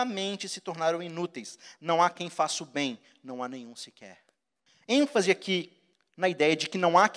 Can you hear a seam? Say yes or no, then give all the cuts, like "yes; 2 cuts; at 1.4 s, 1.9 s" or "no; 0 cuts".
no; 0 cuts